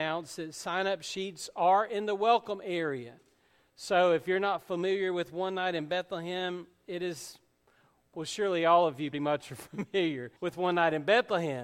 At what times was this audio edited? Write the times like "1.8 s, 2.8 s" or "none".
9.1 s, 10.4 s